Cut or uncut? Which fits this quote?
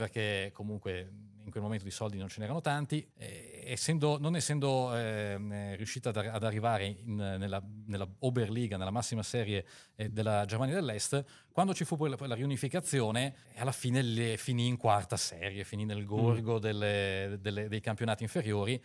cut